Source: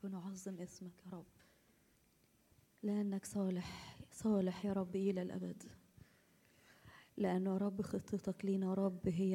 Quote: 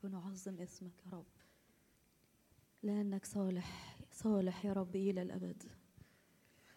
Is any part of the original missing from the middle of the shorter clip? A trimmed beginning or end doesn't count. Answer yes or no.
no